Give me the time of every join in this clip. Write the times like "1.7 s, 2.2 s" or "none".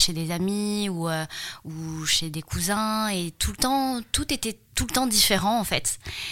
4.7 s

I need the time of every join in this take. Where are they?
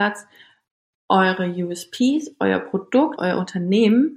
3.2 s

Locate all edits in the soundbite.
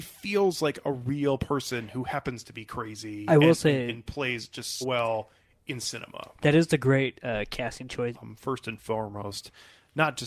4.8 s, 8.1 s

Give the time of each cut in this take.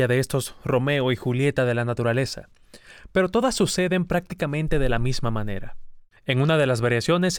6.2 s

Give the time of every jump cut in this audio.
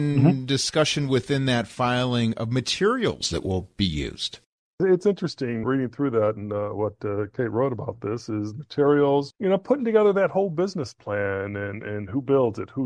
5.6 s, 9.3 s

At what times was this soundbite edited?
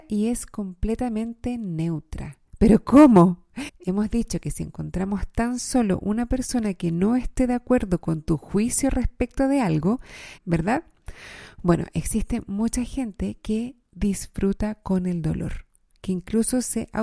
2.5 s, 3.7 s, 10.4 s

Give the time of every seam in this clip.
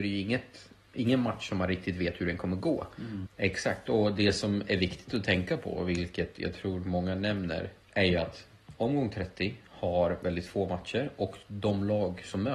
3.3 s, 7.8 s

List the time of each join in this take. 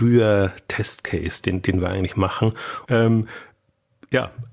2.9 s

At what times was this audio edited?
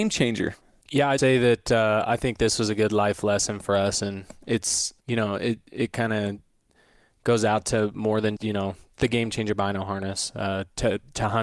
1.2 s, 8.4 s

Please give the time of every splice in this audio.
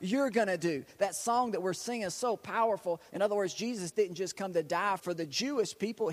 3.1 s, 5.0 s

